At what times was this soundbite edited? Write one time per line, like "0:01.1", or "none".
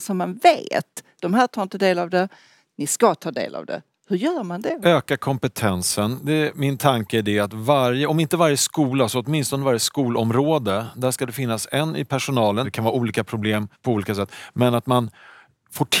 0:06.5
0:12.6